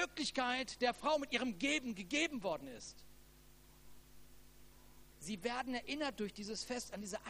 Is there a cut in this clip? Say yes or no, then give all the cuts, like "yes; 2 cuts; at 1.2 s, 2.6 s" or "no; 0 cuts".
yes; 1 cut; at 5.1 s